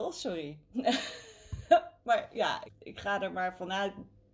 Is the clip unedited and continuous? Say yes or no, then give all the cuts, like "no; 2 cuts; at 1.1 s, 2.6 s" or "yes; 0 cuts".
no; 1 cut; at 2.6 s